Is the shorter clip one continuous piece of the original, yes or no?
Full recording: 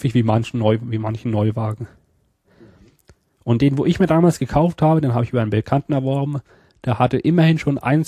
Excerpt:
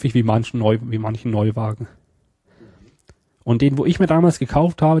yes